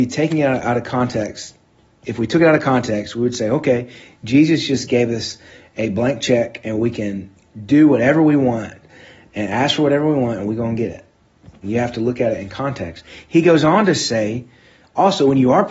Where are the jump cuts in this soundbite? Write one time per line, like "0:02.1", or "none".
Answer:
0:11.6